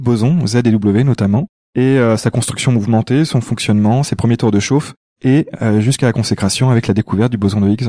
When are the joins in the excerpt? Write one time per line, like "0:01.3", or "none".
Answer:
none